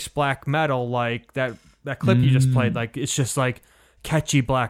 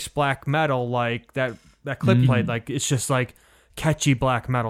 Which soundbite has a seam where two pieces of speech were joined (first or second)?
second